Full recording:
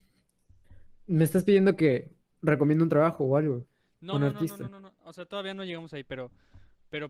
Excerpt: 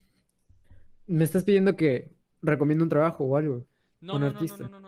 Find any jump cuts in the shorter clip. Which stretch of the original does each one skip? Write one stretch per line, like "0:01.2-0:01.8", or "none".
none